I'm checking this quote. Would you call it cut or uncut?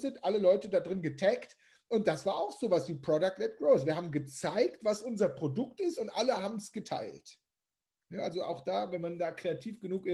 uncut